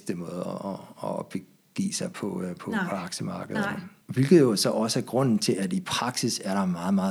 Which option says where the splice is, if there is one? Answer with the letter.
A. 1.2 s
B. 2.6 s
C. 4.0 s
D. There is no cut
C